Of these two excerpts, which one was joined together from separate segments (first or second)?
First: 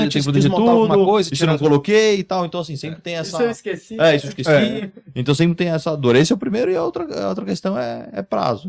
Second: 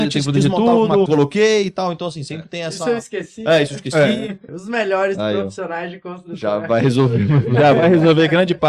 second